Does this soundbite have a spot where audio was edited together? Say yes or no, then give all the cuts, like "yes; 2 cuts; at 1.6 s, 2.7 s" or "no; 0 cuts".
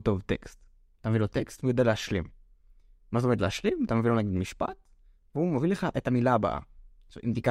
no; 0 cuts